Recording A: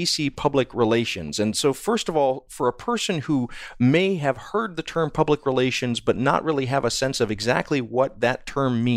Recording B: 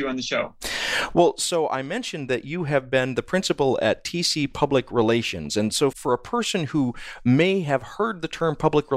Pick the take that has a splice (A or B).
B